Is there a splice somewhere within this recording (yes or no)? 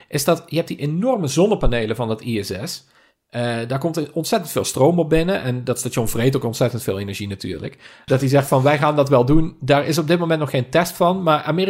yes